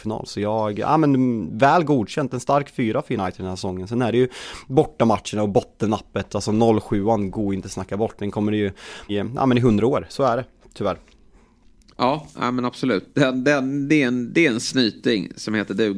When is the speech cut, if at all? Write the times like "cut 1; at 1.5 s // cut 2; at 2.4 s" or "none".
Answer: cut 1; at 9.1 s

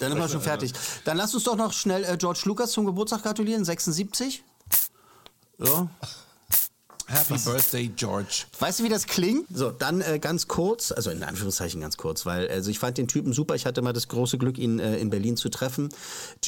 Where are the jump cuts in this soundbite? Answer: cut 1; at 9.5 s

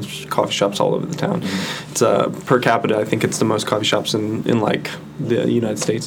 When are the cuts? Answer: none

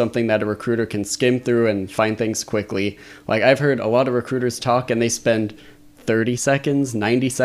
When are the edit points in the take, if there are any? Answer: none

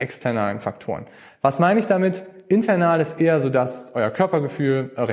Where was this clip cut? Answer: none

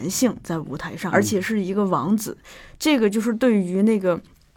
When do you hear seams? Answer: cut 1; at 1.1 s

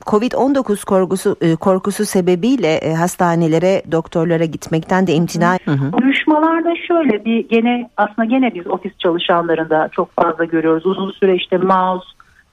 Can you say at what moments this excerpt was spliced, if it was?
cut 1; at 5.6 s

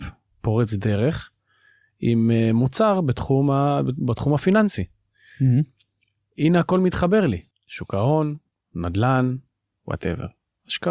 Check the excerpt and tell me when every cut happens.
cut 1; at 7.5 s

